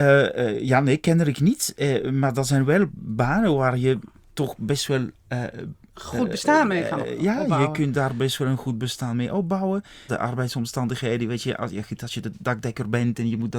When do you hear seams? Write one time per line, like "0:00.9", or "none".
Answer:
0:10.1